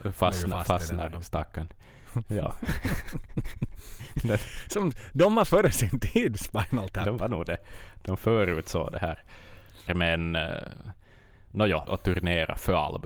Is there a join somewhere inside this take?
yes; 2 cuts; at 9.9 s, 11.9 s

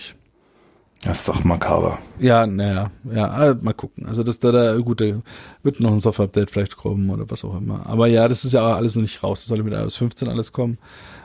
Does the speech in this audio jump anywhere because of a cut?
no; 0 cuts

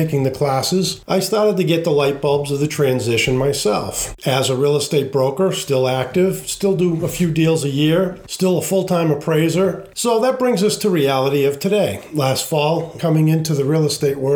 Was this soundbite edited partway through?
yes; 2 cuts; at 9.9 s, 13.0 s

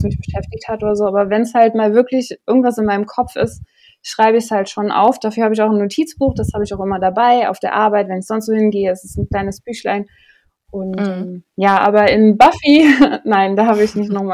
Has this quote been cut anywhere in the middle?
no; 0 cuts

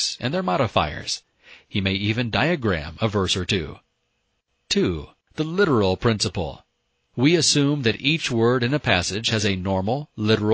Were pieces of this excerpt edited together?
no; 0 cuts

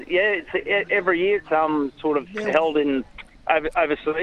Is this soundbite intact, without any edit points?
yes; 0 cuts

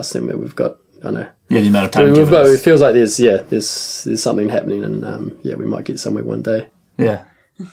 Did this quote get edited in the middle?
no; 0 cuts

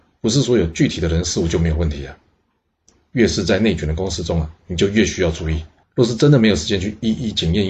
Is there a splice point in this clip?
yes; 1 cut; at 5.8 s

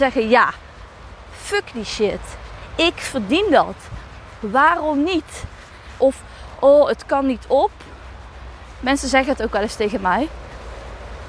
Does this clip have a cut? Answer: yes; 2 cuts; at 4.4 s, 6.0 s

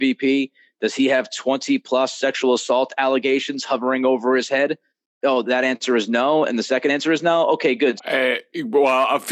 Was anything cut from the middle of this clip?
yes; 1 cut; at 8.0 s

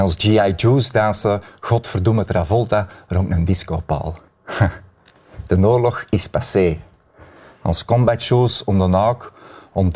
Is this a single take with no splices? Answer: yes; 0 cuts

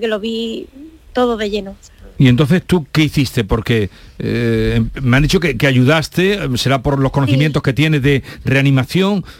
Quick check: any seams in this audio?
no; 0 cuts

